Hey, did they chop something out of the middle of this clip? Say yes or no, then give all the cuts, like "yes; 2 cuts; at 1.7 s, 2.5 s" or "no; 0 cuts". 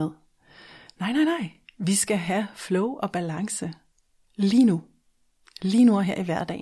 no; 0 cuts